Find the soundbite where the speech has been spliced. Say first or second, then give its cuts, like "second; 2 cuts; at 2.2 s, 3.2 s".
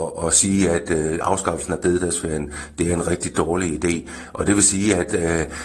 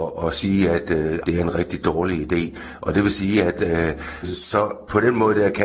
second; 2 cuts; at 1.2 s, 4.2 s